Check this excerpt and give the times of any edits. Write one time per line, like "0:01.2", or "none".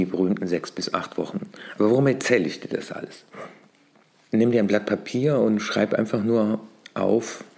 0:04.3